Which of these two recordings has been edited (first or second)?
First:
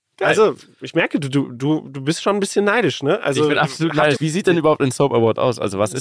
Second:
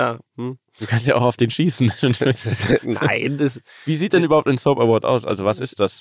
first